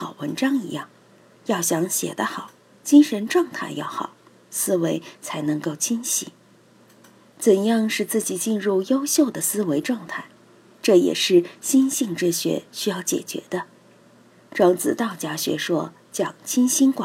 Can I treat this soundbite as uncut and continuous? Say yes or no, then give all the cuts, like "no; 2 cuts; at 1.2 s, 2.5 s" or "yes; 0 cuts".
no; 1 cut; at 4.4 s